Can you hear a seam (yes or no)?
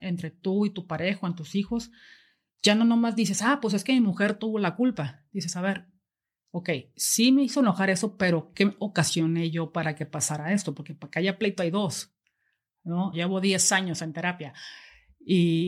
yes